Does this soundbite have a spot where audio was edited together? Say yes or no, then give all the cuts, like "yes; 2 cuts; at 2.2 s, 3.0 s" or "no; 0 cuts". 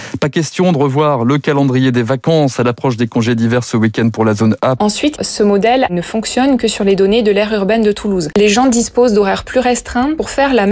yes; 2 cuts; at 4.8 s, 8.3 s